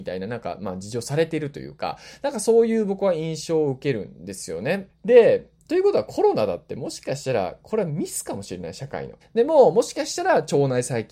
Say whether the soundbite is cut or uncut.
cut